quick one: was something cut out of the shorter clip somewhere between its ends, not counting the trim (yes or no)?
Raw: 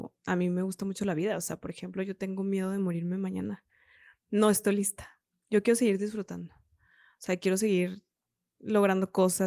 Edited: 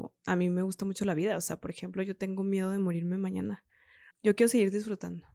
yes